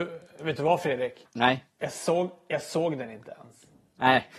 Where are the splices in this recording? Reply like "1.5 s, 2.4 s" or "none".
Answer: none

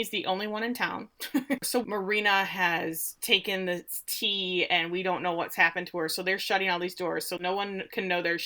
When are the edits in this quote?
1.6 s, 7.4 s

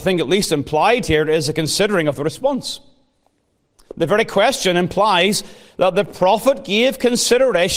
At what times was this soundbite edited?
none

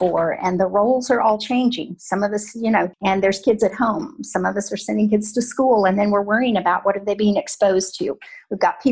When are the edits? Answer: 2.9 s

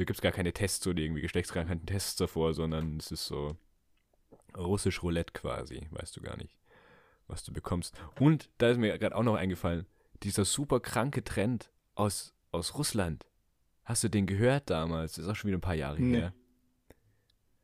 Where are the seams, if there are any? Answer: none

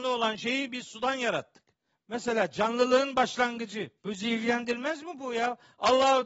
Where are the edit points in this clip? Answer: 1.9 s, 4.0 s

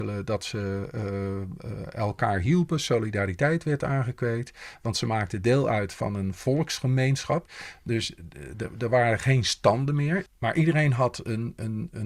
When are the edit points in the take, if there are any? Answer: 7.5 s, 10.3 s

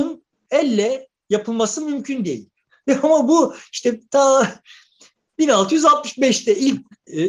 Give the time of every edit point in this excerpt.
2.7 s

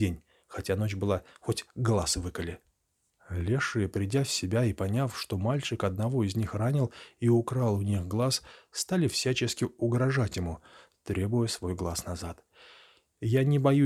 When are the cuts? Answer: none

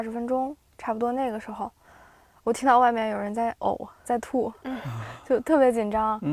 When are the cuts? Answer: 4.0 s

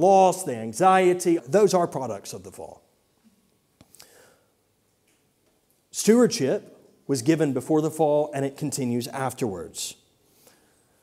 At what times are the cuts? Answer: 1.4 s

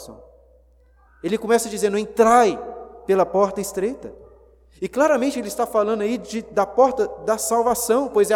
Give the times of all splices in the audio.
1.1 s

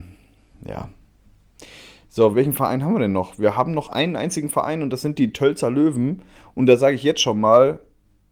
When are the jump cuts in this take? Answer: 2.3 s

